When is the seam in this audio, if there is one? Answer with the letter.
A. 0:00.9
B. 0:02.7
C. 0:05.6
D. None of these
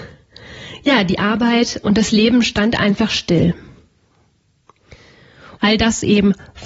C